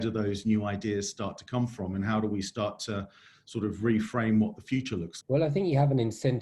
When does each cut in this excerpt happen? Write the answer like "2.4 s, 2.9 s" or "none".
5.2 s